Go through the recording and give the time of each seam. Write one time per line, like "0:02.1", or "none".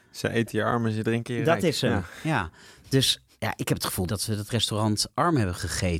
none